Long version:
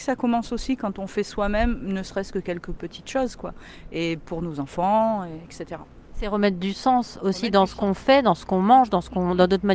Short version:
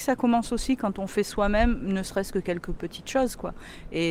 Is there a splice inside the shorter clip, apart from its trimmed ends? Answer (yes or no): no